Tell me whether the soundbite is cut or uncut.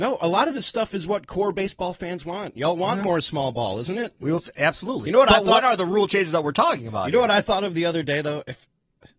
cut